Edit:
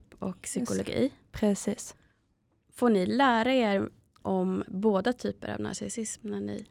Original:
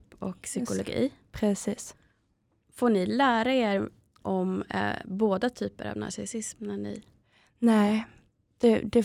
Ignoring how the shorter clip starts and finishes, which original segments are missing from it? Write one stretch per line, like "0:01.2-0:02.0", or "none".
0:04.7-0:05.0